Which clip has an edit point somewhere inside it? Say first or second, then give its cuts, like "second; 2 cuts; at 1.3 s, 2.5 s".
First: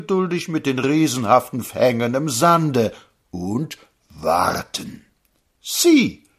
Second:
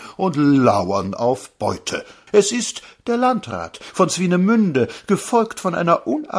second; 1 cut; at 2.3 s